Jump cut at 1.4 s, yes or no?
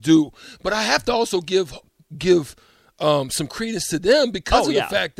no